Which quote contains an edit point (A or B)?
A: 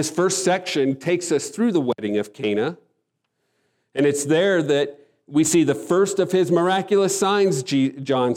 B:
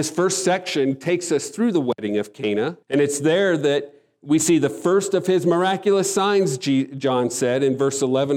B